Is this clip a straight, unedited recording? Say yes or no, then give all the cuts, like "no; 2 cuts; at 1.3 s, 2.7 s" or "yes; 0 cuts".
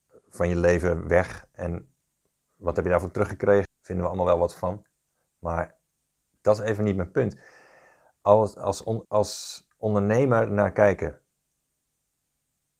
no; 2 cuts; at 3.7 s, 9.0 s